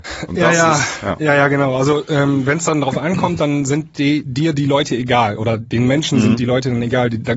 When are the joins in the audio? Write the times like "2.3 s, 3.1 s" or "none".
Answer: none